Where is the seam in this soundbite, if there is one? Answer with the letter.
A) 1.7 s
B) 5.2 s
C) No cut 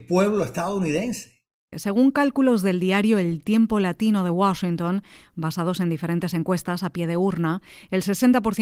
A